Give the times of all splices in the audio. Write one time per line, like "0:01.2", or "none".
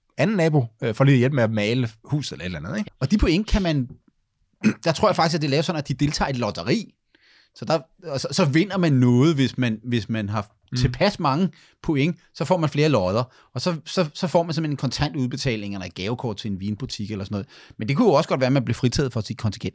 0:02.8